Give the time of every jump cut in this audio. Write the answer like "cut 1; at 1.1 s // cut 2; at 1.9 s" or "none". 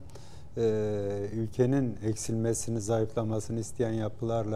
cut 1; at 1.3 s